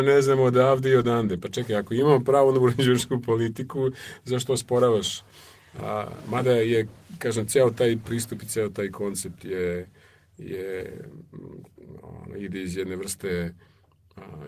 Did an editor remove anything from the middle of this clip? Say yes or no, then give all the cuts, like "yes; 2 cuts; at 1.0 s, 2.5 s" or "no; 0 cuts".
no; 0 cuts